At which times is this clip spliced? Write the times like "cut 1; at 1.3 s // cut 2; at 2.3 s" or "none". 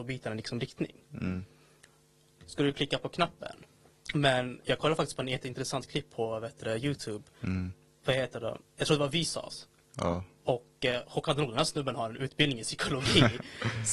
cut 1; at 2.4 s // cut 2; at 3.9 s